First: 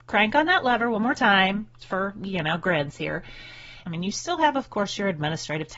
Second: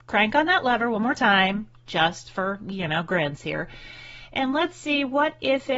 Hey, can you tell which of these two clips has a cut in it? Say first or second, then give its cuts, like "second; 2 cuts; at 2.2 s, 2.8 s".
first; 2 cuts; at 1.8 s, 3.8 s